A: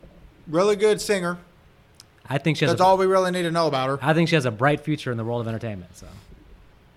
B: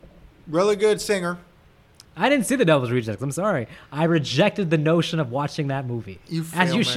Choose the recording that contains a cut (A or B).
B